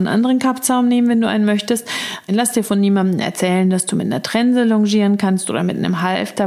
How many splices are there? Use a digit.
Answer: 1